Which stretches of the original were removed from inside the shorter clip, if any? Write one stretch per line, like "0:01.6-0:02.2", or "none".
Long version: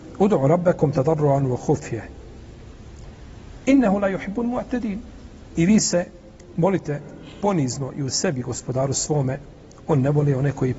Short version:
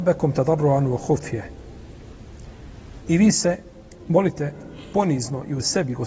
0:03.6-0:05.5